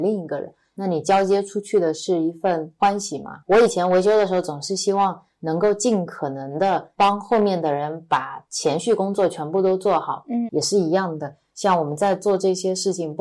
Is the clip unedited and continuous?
no; 2 cuts; at 3.4 s, 10.5 s

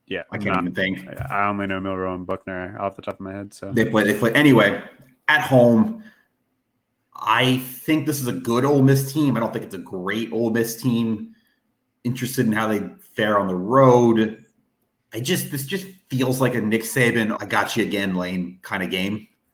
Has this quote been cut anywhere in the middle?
yes; 2 cuts; at 15.0 s, 17.4 s

